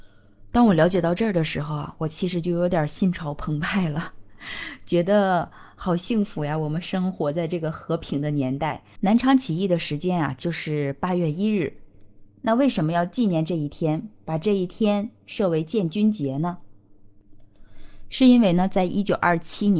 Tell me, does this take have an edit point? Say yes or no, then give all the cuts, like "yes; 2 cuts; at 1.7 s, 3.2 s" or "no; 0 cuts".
yes; 1 cut; at 9.0 s